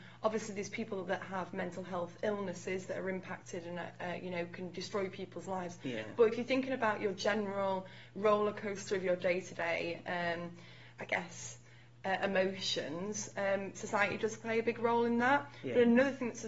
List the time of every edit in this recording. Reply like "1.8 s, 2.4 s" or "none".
none